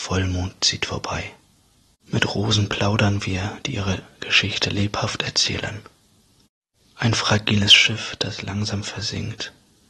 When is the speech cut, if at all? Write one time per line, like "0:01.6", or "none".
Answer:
0:02.0